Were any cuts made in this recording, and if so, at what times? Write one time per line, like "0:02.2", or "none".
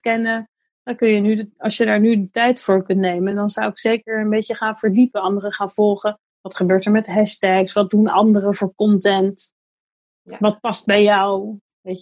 none